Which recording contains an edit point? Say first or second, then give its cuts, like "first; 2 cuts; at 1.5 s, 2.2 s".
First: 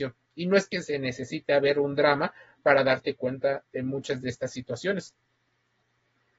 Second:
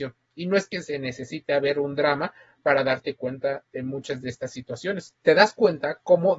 second; 1 cut; at 5.2 s